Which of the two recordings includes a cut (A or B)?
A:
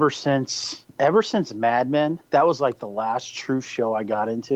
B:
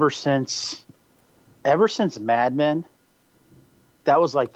A